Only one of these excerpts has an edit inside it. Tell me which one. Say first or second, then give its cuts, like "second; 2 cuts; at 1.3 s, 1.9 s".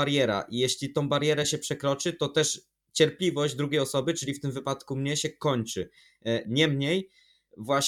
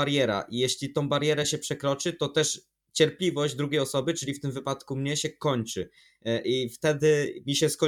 first; 1 cut; at 6.4 s